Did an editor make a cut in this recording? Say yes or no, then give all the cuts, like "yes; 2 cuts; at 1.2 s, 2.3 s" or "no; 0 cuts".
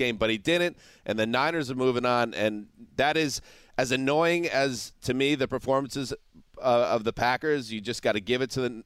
no; 0 cuts